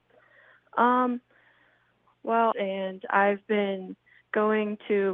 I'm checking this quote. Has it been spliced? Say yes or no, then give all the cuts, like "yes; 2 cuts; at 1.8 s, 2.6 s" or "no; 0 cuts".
yes; 1 cut; at 2.5 s